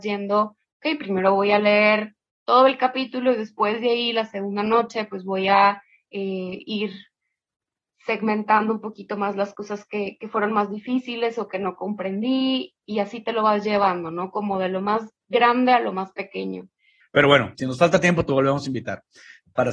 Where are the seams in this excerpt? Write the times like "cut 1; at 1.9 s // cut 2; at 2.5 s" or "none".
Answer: cut 1; at 17.0 s